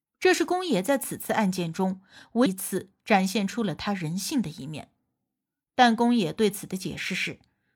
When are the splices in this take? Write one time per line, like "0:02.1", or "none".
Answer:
0:02.5